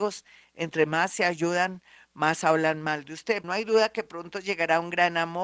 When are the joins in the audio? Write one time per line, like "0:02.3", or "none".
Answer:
0:03.4